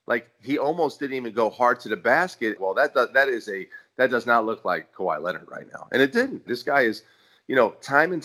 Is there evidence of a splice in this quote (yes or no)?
yes